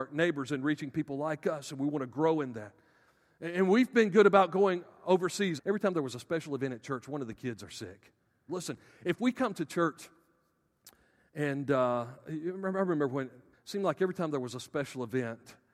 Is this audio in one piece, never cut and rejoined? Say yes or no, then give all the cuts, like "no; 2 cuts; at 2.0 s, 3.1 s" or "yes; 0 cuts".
no; 3 cuts; at 5.6 s, 8.5 s, 13.5 s